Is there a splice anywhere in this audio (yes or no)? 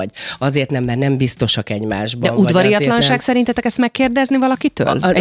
no